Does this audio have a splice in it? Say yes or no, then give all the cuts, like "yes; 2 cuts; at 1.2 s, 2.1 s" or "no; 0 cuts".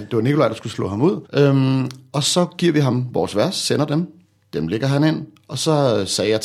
yes; 1 cut; at 1.3 s